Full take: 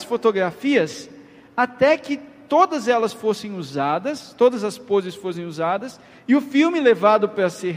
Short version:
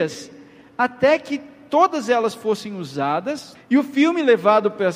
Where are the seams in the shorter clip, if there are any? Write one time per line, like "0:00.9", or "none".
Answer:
0:03.5